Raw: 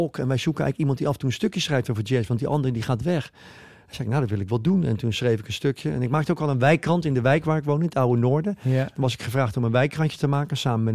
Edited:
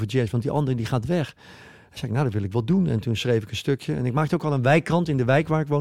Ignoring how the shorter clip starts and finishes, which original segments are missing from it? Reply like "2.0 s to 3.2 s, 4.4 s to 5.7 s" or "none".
none